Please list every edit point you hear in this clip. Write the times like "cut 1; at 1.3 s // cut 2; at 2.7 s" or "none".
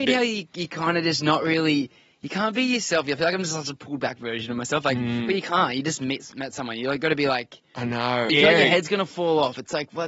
cut 1; at 8.3 s